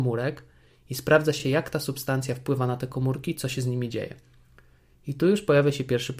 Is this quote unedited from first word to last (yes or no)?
yes